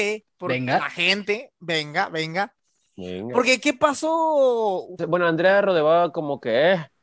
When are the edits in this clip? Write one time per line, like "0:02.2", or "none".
0:05.0